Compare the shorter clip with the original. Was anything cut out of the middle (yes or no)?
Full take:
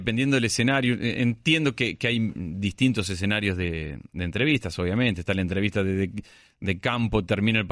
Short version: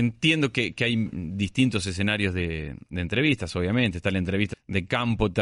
yes